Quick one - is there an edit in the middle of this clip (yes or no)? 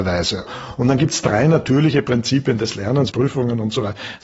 yes